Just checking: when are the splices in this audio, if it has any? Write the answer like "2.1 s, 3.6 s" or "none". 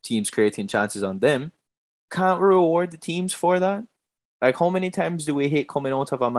none